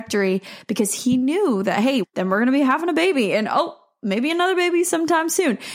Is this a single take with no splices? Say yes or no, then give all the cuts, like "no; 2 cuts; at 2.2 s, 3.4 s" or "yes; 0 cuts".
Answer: no; 1 cut; at 2.0 s